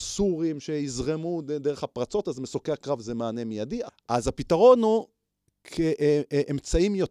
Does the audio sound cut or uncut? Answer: cut